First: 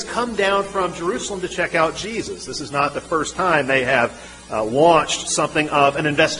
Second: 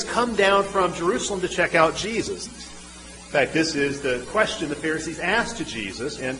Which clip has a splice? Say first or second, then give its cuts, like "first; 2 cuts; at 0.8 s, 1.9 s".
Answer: second; 1 cut; at 2.5 s